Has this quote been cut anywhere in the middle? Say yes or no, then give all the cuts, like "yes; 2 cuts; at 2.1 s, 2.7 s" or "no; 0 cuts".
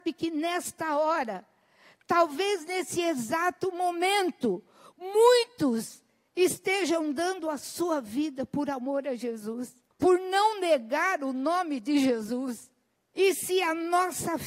no; 0 cuts